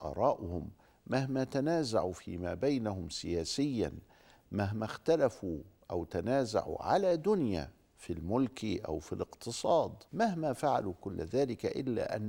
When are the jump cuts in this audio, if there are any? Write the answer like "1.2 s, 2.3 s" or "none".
10.1 s